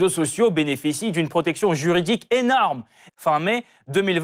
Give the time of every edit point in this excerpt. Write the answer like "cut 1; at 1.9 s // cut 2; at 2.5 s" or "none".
cut 1; at 3.1 s